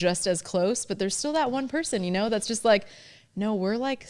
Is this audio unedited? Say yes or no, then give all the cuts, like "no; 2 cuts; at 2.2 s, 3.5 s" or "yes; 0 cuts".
yes; 0 cuts